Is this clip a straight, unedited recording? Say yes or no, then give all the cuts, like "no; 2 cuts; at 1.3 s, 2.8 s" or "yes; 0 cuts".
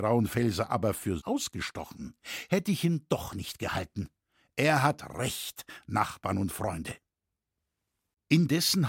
no; 1 cut; at 1.2 s